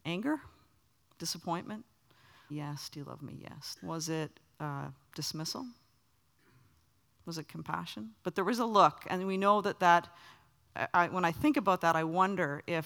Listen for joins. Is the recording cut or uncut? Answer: cut